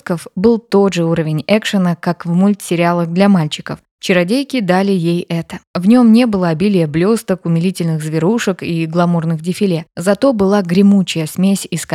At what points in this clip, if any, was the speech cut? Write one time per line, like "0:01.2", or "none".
none